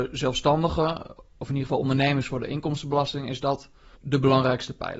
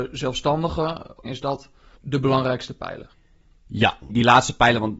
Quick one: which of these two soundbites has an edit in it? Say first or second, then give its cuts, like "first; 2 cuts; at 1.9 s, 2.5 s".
second; 2 cuts; at 1.2 s, 4.1 s